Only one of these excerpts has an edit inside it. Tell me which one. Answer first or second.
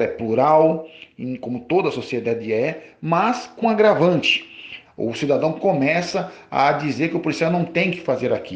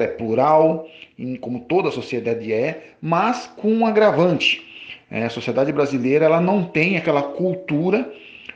first